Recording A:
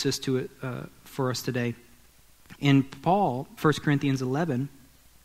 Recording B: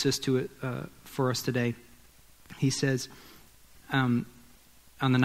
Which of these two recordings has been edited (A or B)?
A